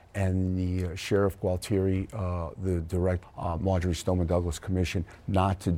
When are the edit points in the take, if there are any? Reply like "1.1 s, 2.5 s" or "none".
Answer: 3.2 s

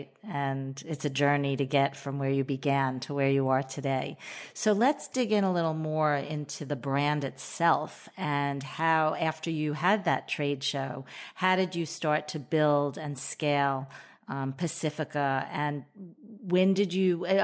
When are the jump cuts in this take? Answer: none

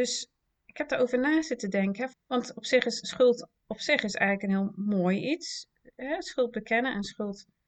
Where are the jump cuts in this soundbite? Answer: 2.1 s

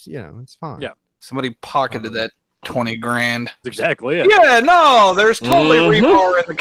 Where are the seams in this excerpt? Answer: 3.6 s

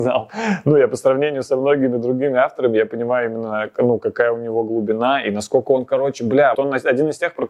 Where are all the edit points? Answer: 6.5 s

